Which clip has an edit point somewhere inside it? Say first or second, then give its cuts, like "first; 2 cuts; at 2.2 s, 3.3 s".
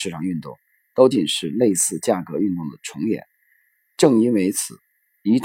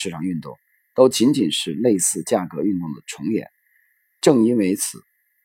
first; 1 cut; at 1.1 s